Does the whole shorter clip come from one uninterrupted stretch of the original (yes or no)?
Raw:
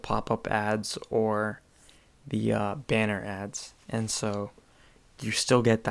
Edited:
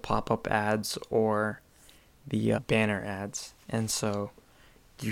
no